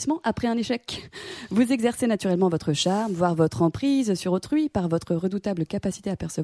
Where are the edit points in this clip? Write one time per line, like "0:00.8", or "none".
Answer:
none